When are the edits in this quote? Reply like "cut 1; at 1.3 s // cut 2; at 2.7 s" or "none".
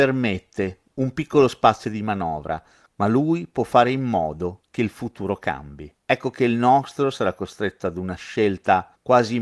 cut 1; at 2.9 s